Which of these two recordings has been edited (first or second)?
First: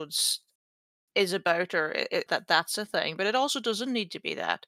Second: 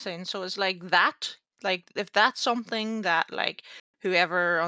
first